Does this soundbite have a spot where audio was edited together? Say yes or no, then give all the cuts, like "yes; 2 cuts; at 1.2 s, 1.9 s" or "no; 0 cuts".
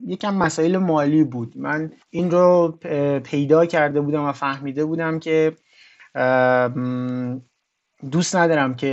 yes; 1 cut; at 2.0 s